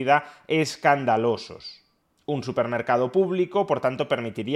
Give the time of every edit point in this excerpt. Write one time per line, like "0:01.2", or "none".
none